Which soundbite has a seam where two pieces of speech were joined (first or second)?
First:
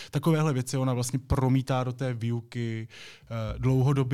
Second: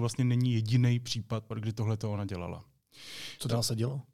second